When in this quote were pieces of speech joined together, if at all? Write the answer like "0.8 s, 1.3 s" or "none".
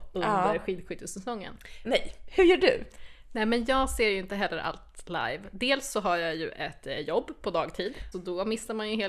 1.8 s, 8.1 s